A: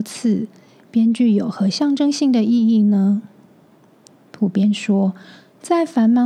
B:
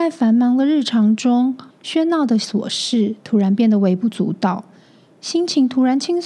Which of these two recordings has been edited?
B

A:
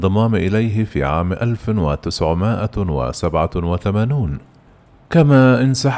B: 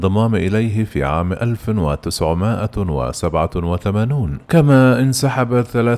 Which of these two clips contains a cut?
B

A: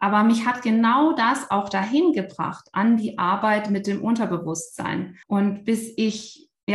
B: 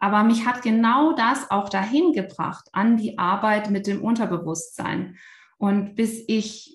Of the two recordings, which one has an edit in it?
A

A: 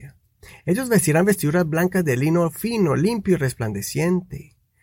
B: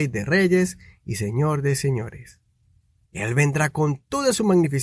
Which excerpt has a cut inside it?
B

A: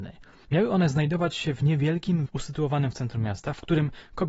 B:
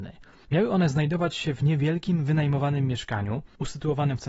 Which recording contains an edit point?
A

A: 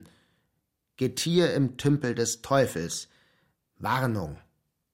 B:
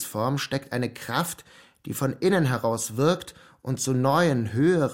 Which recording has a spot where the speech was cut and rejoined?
A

